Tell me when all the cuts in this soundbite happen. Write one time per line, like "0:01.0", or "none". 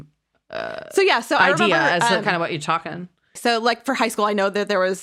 0:03.4

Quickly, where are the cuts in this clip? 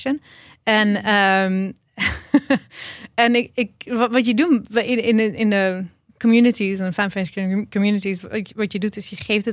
none

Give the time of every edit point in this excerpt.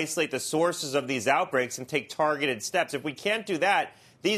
none

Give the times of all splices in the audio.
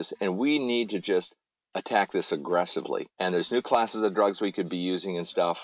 0:01.7
0:03.1

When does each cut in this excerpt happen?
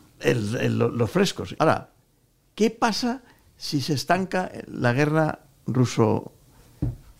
0:01.6

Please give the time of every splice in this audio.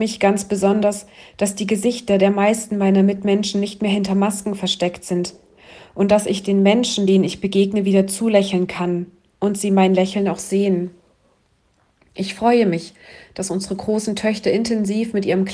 none

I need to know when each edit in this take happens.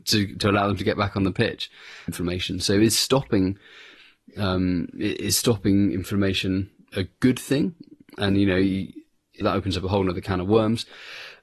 0:02.1
0:09.4

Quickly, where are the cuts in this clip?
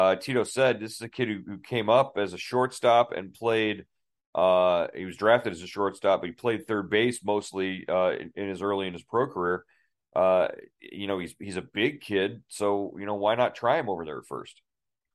none

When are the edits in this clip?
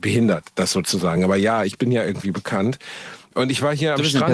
none

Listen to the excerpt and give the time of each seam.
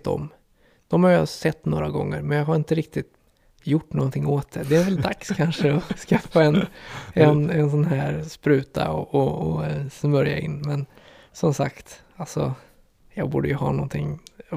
none

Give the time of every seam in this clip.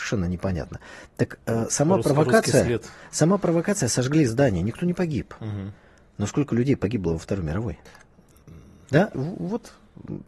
0:09.1

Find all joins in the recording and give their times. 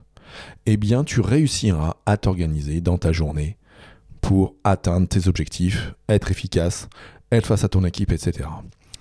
none

